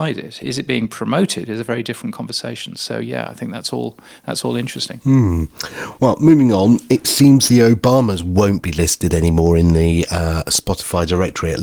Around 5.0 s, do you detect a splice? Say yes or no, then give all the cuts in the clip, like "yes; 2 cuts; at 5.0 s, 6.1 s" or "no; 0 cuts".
no; 0 cuts